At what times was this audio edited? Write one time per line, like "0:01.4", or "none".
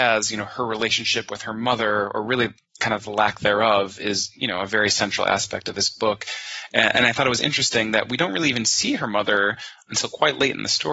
none